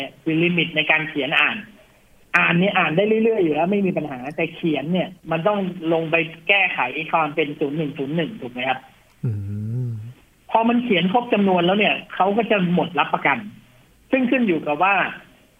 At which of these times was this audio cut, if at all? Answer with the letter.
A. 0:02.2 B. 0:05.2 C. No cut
B